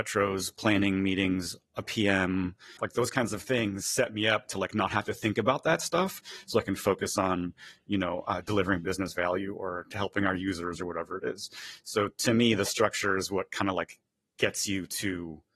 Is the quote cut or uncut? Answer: cut